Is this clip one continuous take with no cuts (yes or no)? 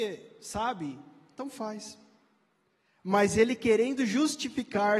yes